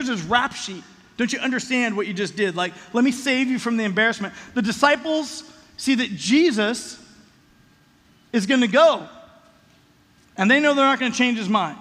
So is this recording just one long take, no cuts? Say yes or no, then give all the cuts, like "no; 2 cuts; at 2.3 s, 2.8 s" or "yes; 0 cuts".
yes; 0 cuts